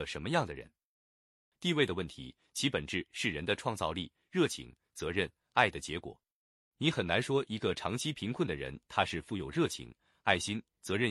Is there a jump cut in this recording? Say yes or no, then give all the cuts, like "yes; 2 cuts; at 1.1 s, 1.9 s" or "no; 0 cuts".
yes; 1 cut; at 1.5 s